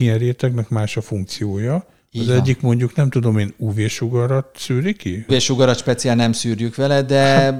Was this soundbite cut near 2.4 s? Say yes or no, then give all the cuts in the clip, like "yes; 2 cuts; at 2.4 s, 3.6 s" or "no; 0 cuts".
no; 1 cut; at 5.3 s